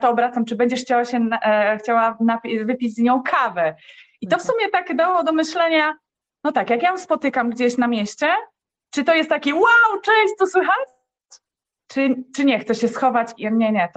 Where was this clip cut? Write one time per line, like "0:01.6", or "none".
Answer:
none